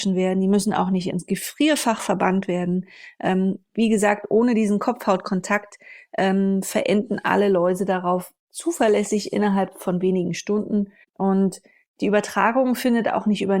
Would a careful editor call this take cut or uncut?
cut